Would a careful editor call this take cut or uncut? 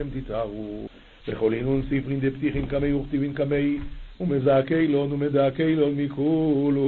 cut